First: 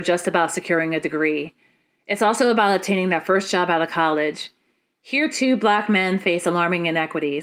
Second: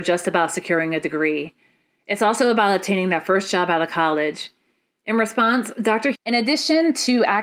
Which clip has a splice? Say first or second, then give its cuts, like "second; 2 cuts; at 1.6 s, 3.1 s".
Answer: second; 2 cuts; at 4.9 s, 6.1 s